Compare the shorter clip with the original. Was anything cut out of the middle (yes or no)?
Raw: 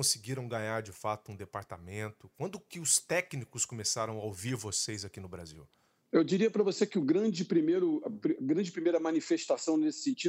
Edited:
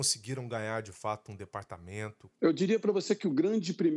yes